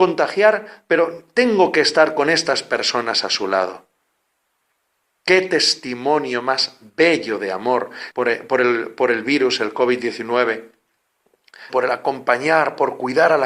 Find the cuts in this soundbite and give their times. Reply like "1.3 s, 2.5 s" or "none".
8.1 s, 11.7 s